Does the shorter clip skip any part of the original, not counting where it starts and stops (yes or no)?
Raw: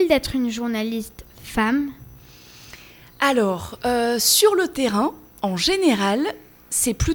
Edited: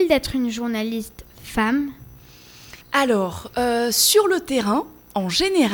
yes